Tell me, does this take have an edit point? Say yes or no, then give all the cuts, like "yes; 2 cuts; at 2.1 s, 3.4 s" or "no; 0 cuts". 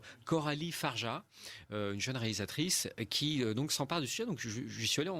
no; 0 cuts